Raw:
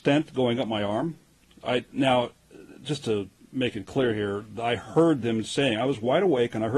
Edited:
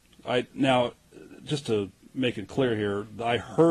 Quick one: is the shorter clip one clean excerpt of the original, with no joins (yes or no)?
yes